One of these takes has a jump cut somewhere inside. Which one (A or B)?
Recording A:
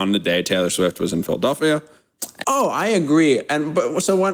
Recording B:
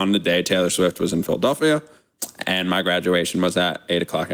A